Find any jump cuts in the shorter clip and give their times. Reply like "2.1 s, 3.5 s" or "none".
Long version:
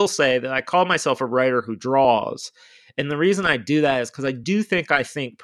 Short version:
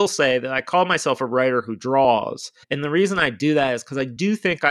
2.6 s